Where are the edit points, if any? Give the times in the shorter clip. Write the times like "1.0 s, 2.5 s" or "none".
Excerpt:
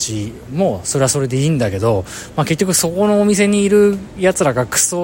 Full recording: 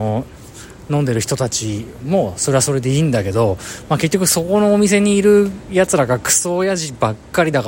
none